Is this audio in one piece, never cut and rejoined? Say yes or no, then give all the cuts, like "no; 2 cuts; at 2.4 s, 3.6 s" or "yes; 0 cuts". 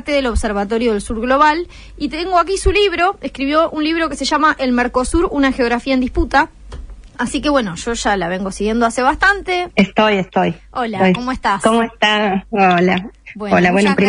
no; 1 cut; at 9.7 s